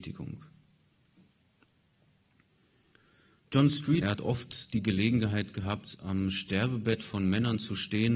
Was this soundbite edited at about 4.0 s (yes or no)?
yes